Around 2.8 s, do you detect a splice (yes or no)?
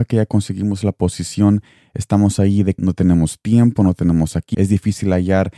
yes